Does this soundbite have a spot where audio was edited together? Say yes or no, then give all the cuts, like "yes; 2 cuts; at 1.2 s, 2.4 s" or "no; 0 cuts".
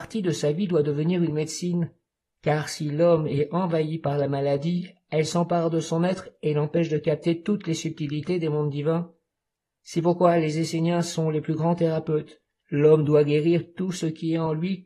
yes; 1 cut; at 12.6 s